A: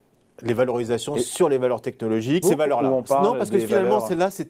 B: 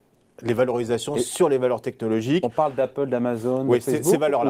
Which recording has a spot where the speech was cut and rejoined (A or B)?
A